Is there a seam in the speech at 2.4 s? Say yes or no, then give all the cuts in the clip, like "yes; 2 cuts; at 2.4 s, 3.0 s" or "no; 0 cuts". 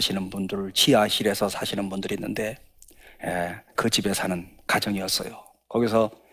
no; 1 cut; at 3.7 s